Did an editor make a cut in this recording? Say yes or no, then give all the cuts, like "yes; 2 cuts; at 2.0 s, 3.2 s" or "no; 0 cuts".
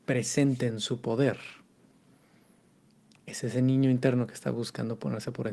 no; 0 cuts